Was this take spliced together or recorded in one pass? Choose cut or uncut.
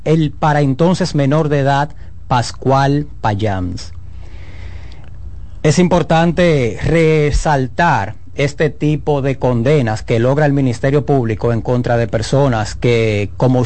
uncut